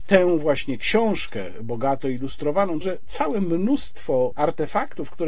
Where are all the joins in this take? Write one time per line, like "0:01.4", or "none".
0:02.8
0:04.3